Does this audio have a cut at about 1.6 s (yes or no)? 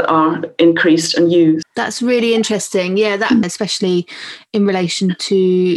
yes